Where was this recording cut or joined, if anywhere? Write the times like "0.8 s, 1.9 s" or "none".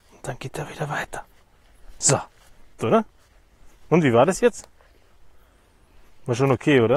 2.8 s